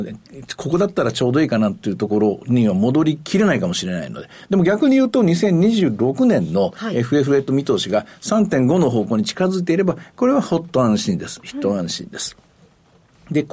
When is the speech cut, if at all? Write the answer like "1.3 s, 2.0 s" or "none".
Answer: none